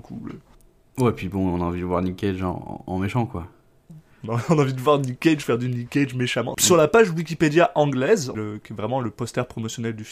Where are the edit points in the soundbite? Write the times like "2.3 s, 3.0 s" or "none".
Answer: 6.5 s, 8.3 s